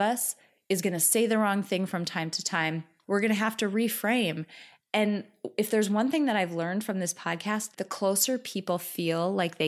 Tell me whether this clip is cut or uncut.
cut